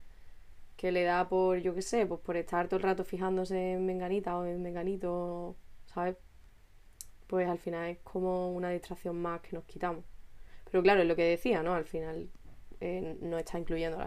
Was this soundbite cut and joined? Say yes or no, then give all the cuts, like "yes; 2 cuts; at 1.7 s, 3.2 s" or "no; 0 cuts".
no; 0 cuts